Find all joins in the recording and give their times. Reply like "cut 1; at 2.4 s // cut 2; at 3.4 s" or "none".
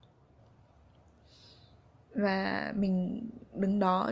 none